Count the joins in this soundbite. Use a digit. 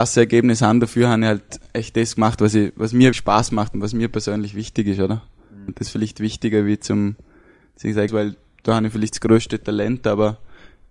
3